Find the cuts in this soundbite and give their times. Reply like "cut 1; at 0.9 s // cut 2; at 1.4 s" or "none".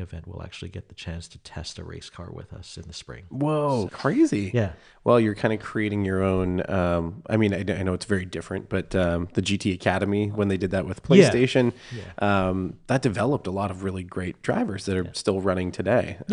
cut 1; at 3.9 s

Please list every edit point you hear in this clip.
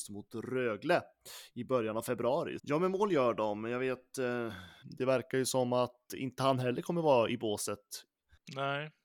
cut 1; at 2.6 s // cut 2; at 4.8 s

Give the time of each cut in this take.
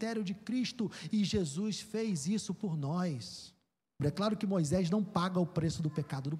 cut 1; at 4.0 s

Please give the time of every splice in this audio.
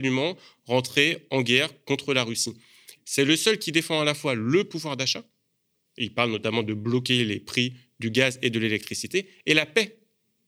cut 1; at 3.0 s

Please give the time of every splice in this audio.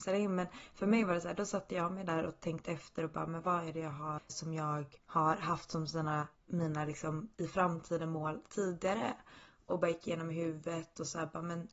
cut 1; at 4.3 s

